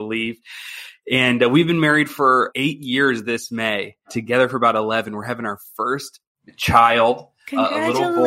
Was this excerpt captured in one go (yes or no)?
yes